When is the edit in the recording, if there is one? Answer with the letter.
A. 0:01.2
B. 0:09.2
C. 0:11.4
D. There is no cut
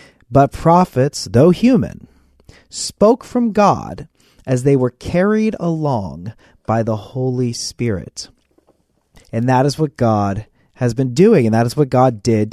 B